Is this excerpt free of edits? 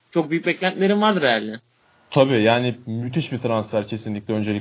yes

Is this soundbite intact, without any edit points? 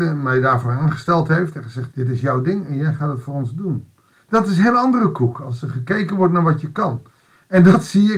no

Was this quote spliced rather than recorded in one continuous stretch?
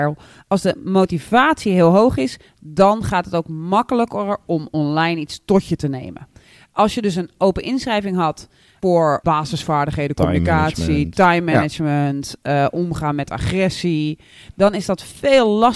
no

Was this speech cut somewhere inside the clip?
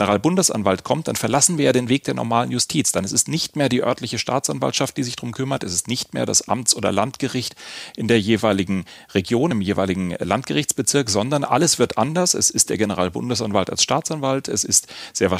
no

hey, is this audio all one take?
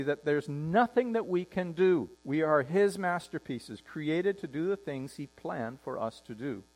no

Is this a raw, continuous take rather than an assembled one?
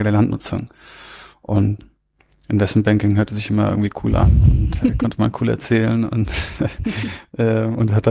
yes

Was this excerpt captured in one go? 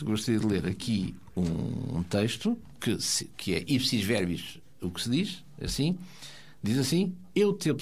yes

